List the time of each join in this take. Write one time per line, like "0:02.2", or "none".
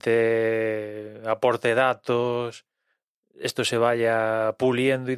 none